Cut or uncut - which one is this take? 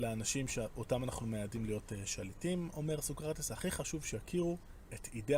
uncut